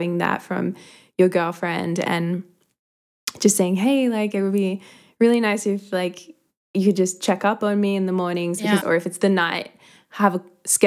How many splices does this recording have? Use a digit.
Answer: 1